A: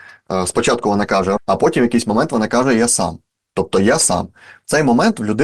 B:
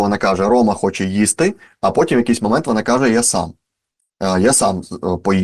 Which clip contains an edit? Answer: A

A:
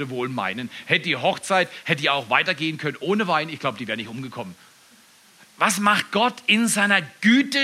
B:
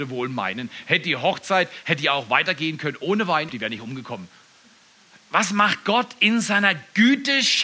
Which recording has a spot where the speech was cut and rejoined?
B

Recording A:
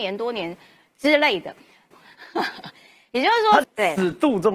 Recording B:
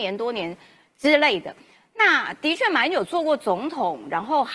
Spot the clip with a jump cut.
A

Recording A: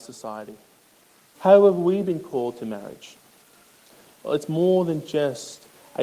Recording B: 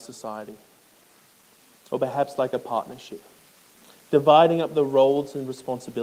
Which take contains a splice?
A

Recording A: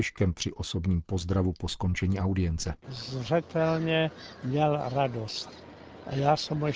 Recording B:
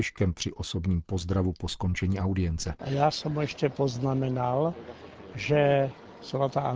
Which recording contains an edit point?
B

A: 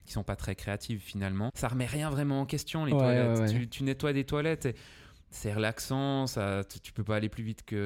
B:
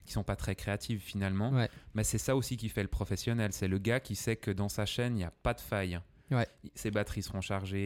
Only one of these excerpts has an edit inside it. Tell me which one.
A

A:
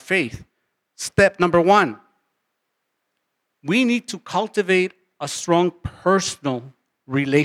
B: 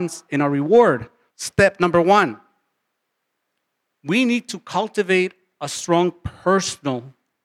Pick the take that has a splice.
B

